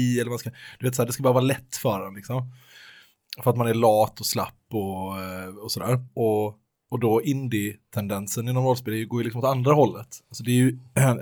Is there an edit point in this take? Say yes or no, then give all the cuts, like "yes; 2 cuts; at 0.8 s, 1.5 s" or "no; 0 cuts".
no; 0 cuts